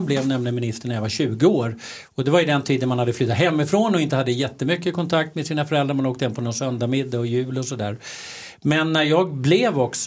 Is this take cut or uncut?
uncut